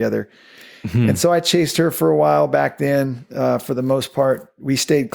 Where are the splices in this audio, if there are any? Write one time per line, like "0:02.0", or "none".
none